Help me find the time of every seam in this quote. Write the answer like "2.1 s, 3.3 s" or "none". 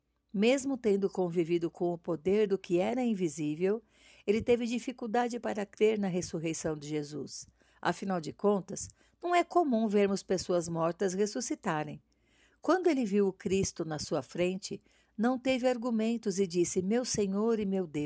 none